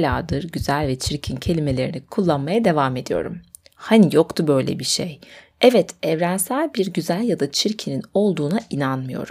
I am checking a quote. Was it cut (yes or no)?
yes